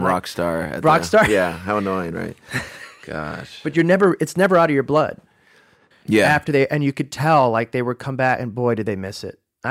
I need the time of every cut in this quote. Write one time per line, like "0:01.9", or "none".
0:05.9

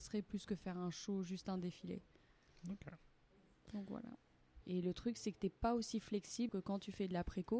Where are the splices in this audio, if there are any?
0:04.6
0:06.5

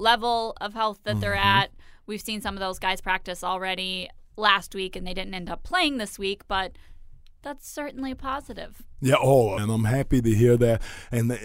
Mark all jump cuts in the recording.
0:09.6

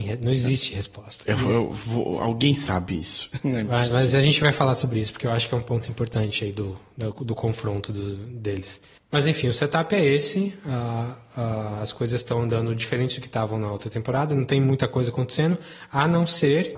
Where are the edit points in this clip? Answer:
none

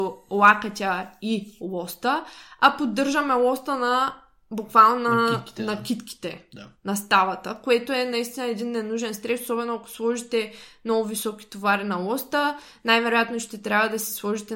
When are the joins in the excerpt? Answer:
none

